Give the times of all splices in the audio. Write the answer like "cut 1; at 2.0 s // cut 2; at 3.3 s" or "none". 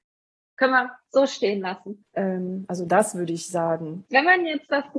cut 1; at 2.0 s // cut 2; at 4.1 s